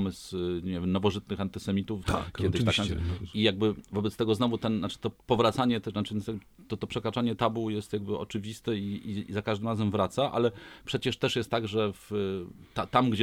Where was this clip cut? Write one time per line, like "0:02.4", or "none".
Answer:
0:02.0